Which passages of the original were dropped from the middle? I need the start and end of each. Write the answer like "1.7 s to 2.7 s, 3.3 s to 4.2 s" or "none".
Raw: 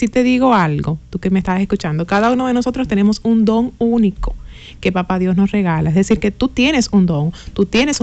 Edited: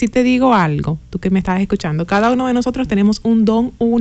none